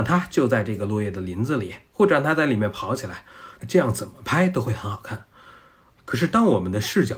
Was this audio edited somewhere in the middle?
yes; 1 cut; at 6.0 s

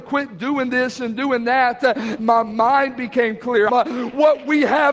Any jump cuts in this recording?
yes; 2 cuts; at 2.2 s, 3.7 s

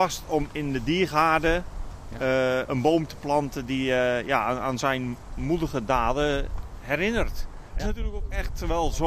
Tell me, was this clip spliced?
yes; 1 cut; at 7.8 s

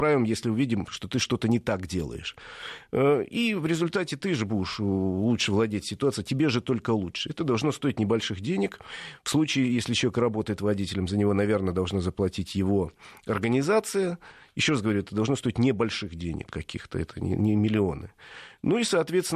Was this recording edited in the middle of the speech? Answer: no; 0 cuts

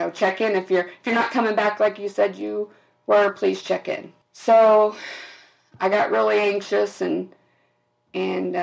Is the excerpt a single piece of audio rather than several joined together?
no; 1 cut; at 4.2 s

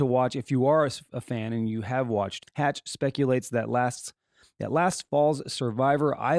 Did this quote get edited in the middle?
yes; 1 cut; at 2.4 s

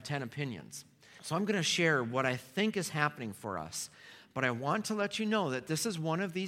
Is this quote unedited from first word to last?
no; 1 cut; at 1.2 s

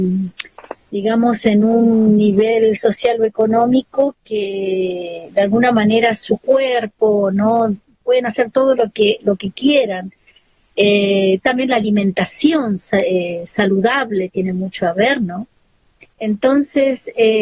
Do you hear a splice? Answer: no; 0 cuts

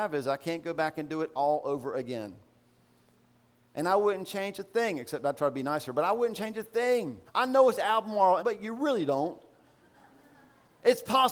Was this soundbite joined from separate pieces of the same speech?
yes; 2 cuts; at 7.3 s, 8.4 s

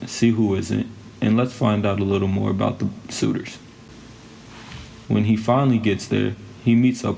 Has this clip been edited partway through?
yes; 1 cut; at 5.0 s

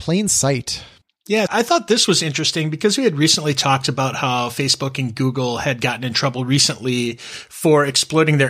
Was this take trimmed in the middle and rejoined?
yes; 1 cut; at 1.5 s

